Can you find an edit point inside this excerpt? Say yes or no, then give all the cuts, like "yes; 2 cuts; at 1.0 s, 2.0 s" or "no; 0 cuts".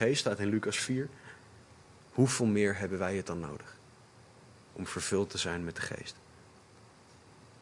no; 0 cuts